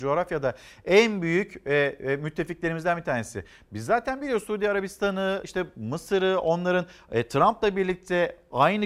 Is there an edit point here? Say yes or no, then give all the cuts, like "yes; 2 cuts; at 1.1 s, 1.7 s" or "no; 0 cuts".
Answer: no; 0 cuts